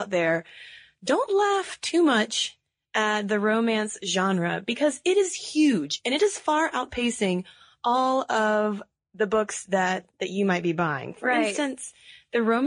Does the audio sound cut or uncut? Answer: uncut